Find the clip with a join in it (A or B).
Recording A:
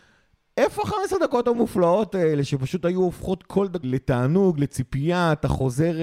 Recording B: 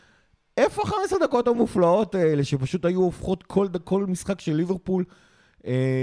A